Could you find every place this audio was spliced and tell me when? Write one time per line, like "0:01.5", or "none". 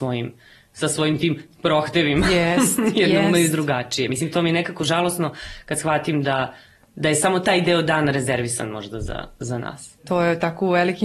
none